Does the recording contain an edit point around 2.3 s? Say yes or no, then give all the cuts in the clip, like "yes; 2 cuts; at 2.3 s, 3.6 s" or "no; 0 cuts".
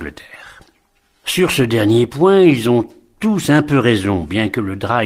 no; 1 cut; at 1.1 s